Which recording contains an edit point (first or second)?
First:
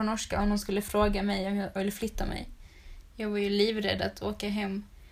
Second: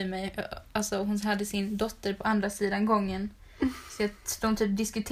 first